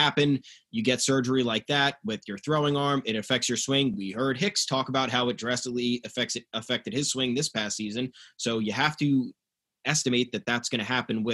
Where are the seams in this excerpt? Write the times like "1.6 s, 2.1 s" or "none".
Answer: none